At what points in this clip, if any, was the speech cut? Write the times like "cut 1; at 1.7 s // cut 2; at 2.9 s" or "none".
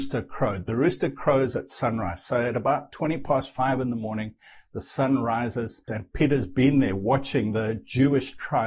cut 1; at 5.9 s